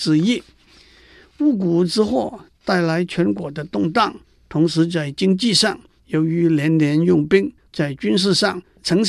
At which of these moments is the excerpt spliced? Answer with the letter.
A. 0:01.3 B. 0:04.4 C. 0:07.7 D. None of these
C